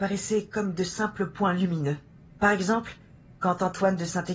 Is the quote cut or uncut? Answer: cut